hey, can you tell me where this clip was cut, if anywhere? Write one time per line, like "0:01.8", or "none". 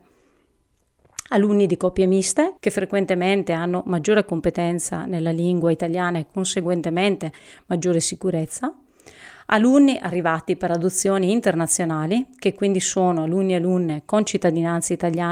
0:02.6